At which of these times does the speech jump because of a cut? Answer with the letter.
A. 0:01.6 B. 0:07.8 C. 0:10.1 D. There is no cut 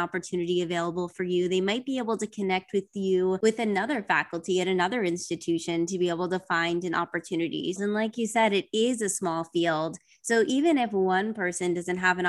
B